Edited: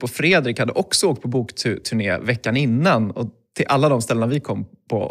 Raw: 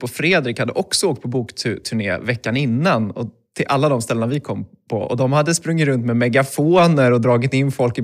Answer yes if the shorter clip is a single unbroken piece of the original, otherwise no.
yes